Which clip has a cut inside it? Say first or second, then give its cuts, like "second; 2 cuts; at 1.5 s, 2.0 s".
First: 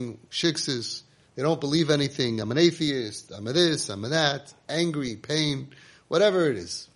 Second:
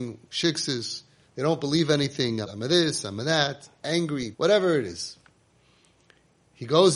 second; 2 cuts; at 2.4 s, 4.3 s